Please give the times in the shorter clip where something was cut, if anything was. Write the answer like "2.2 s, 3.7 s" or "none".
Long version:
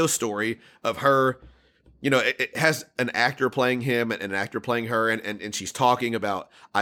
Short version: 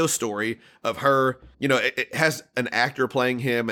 1.5 s